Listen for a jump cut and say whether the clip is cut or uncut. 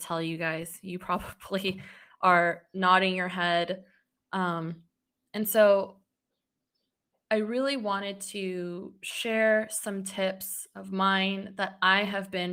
cut